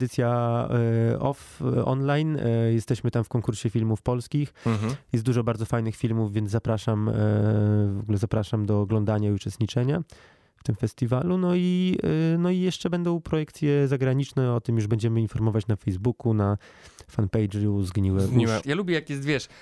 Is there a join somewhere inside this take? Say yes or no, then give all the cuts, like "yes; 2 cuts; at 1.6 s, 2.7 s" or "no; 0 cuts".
yes; 1 cut; at 18.6 s